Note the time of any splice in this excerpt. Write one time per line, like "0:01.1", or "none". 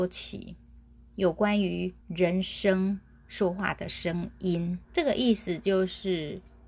0:02.0
0:04.8